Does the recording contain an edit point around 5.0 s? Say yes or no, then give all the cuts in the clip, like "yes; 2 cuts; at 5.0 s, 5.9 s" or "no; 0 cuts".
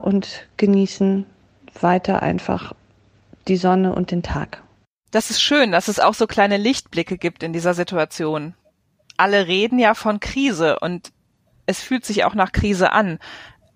no; 0 cuts